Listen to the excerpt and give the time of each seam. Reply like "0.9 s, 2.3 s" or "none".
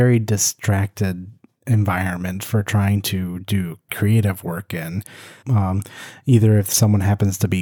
3.9 s, 5.4 s